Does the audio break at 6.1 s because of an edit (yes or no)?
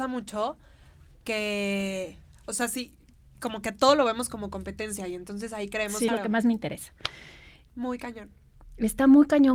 yes